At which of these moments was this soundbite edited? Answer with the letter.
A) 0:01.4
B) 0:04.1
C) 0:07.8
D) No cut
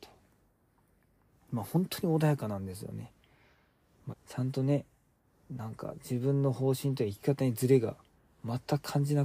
B